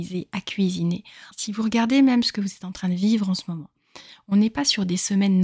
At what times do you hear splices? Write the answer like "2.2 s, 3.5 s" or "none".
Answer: 1.3 s

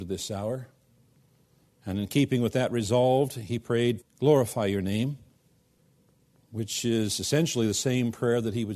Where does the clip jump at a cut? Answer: 4.0 s

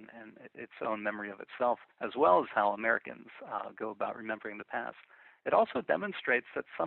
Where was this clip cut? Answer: 1.9 s

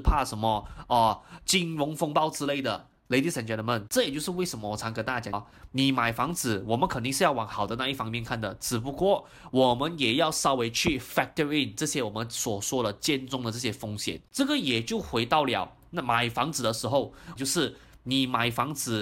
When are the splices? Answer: 3.0 s, 5.3 s, 17.4 s

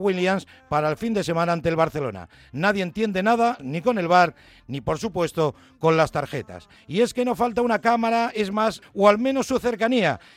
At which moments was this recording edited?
3.6 s, 6.8 s, 8.8 s

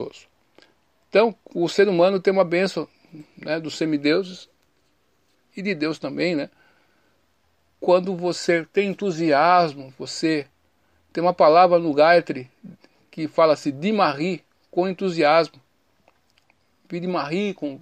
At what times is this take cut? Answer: none

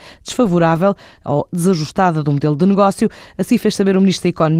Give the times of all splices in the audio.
none

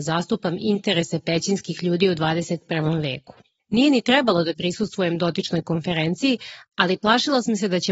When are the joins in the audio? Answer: 3.6 s

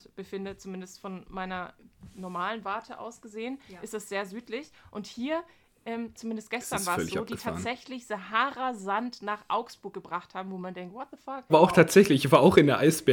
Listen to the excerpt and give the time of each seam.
6.1 s, 11.5 s

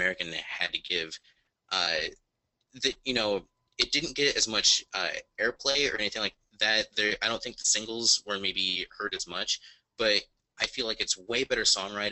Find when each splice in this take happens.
none

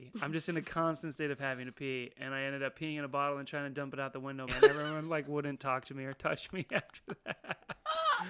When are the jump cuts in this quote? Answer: 4.5 s

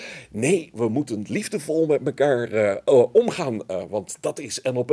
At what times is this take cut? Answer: none

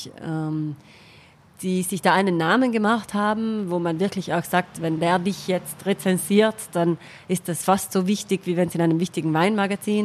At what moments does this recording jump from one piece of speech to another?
none

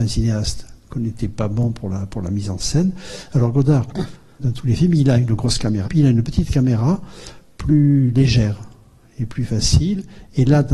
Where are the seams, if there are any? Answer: 4.4 s, 5.8 s

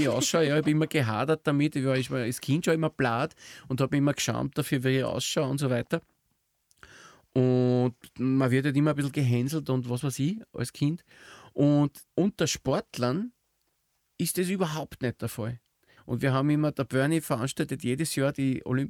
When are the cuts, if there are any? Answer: 12.1 s, 16.0 s

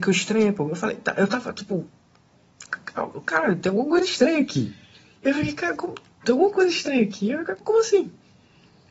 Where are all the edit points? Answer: 6.2 s, 7.6 s

